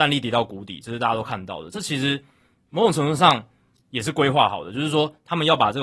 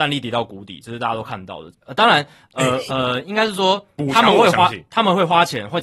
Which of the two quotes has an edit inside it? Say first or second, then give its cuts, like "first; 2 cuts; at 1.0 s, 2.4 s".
second; 2 cuts; at 1.7 s, 2.9 s